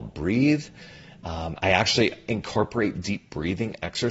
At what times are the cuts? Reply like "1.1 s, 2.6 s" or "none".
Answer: none